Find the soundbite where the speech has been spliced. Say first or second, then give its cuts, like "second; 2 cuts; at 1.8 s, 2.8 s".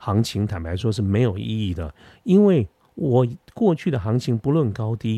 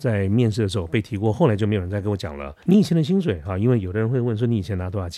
second; 1 cut; at 2.6 s